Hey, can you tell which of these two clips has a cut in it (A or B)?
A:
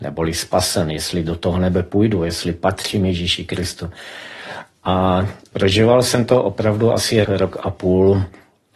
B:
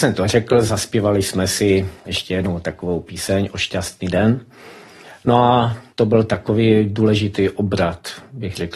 A